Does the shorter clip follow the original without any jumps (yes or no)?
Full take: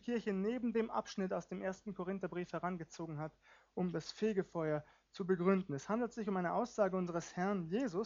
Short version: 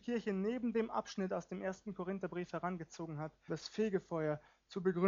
no